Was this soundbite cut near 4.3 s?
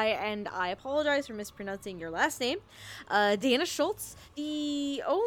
yes; 1 cut; at 4.3 s

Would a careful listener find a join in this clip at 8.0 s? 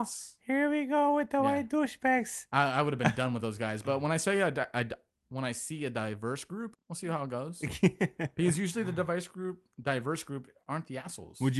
no; 1 cut; at 6.7 s

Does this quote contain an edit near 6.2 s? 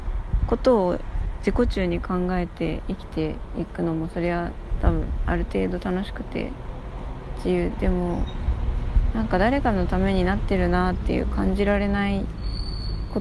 no; 1 cut; at 7.7 s

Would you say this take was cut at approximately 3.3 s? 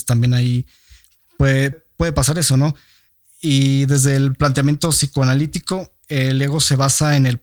no; 1 cut; at 1.7 s

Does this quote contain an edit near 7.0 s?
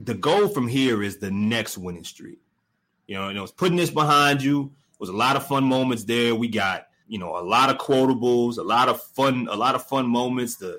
yes; 1 cut; at 7.0 s

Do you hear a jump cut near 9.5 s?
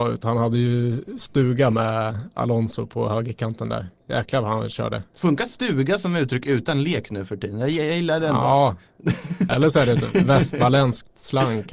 yes; 1 cut; at 9.5 s

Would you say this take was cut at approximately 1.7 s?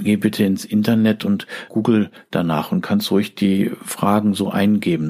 yes; 1 cut; at 1.7 s

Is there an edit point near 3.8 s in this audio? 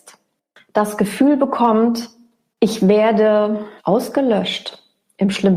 yes; 1 cut; at 3.8 s

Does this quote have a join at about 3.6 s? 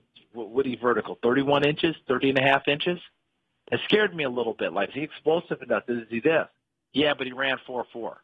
no; 1 cut; at 4.9 s

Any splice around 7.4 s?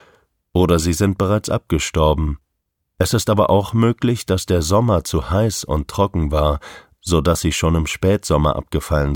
no; 0 cuts

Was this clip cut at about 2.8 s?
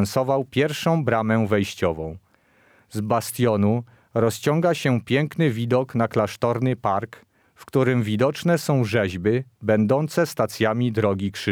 no; 1 cut; at 7.4 s

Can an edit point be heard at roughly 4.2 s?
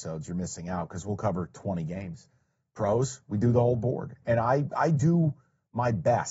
yes; 1 cut; at 4.2 s

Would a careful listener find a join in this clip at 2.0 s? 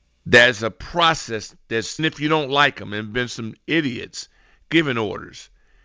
yes; 1 cut; at 2.0 s

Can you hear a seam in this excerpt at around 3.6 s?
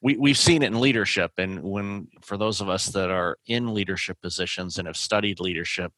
no; 1 cut; at 2.2 s

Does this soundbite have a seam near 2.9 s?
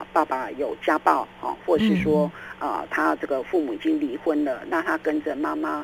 no; 0 cuts

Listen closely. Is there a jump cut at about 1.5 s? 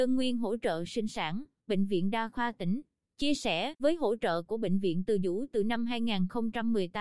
no; 1 cut; at 3.8 s

